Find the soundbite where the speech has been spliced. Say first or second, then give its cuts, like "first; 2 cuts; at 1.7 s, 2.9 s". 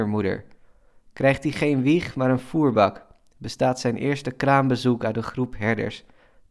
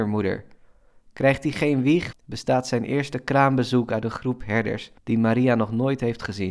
second; 2 cuts; at 2.1 s, 5.0 s